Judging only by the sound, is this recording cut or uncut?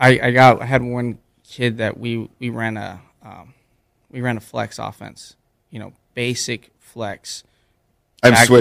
uncut